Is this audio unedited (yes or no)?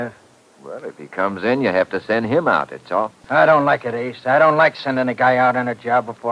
yes